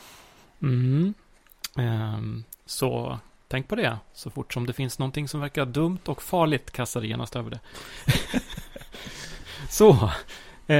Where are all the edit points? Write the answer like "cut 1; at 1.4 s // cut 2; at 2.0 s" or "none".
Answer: cut 1; at 2.6 s